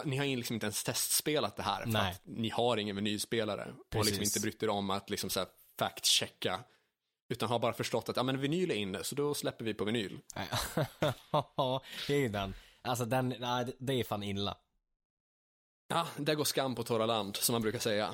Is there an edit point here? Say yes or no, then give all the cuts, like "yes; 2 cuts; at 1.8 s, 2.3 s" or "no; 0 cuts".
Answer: no; 0 cuts